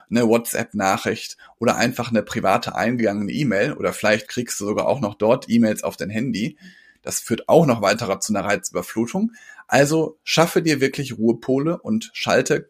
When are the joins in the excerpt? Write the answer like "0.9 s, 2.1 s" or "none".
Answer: 4.3 s